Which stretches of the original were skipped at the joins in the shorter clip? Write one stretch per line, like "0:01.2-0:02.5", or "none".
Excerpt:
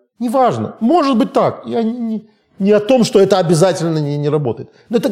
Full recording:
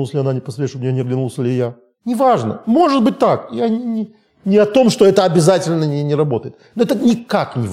none